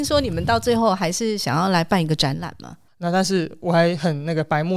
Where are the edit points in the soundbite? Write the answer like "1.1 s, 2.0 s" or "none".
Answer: 2.9 s